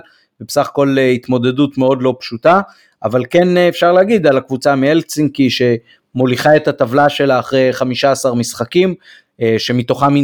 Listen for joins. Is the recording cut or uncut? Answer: uncut